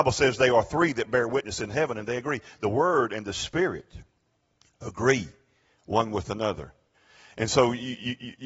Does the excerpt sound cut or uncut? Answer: uncut